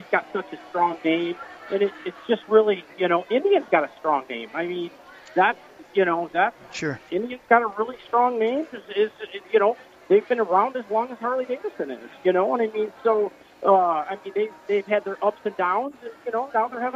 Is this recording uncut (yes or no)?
yes